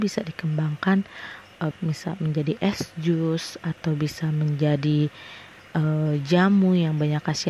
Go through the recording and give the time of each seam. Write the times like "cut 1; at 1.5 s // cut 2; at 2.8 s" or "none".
cut 1; at 1.7 s